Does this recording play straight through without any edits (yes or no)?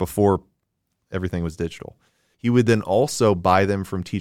no